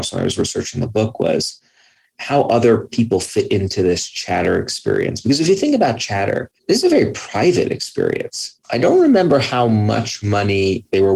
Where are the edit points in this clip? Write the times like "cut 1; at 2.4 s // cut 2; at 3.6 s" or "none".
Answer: cut 1; at 6.6 s // cut 2; at 8.6 s